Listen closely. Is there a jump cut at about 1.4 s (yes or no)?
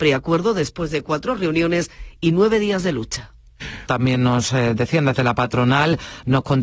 no